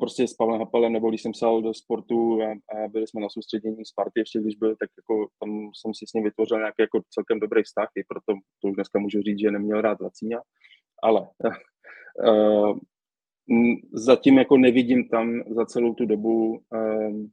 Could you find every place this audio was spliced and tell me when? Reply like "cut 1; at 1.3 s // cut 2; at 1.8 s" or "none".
none